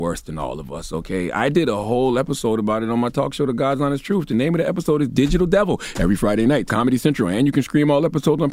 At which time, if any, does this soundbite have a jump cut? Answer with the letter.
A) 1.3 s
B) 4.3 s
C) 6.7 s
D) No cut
C